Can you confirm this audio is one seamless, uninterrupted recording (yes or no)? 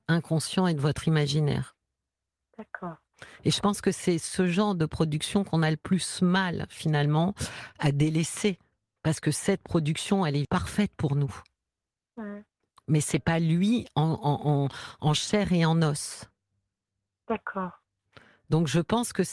no